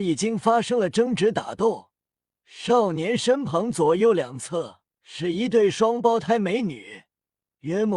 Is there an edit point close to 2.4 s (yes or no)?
yes